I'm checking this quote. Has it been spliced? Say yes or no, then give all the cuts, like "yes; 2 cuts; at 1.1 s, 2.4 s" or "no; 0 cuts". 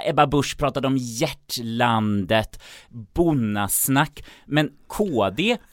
yes; 1 cut; at 2.9 s